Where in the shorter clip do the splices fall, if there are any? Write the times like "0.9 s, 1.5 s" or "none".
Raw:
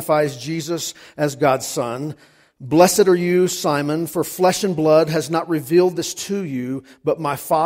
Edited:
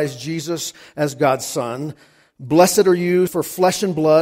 3.3 s